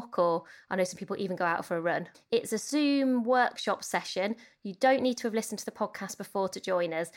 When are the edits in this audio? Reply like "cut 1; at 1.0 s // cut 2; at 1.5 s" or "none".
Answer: cut 1; at 2.1 s